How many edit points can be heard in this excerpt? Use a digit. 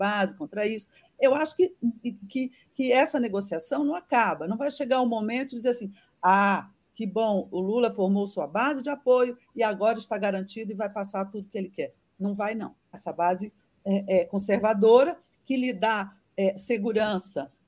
2